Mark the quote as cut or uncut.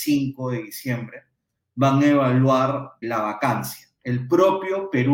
cut